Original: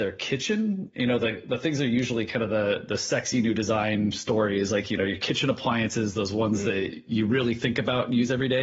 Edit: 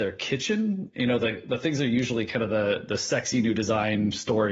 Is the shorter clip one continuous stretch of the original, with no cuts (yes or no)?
yes